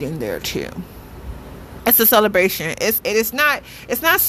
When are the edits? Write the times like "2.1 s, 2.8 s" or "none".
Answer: 1.8 s, 3.0 s